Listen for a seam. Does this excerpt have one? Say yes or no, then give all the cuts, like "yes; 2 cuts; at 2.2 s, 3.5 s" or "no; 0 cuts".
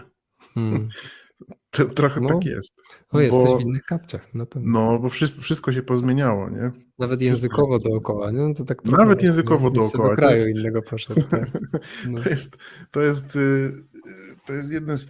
no; 0 cuts